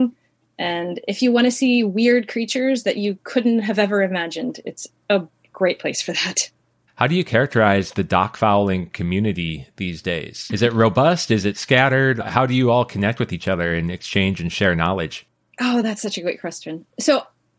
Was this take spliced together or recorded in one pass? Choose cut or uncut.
cut